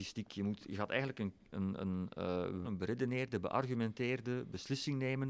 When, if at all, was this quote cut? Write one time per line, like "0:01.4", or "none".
0:02.6